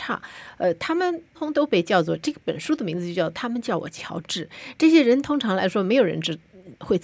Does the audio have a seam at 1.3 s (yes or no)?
yes